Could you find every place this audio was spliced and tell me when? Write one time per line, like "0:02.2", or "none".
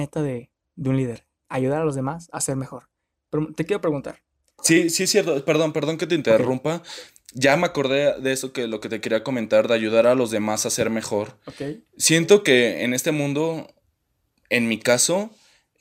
none